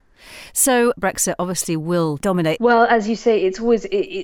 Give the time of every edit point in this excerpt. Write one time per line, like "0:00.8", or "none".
0:02.6